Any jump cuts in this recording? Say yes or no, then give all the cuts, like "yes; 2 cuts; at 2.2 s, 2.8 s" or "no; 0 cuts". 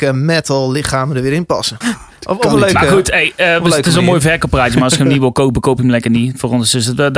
yes; 1 cut; at 1.8 s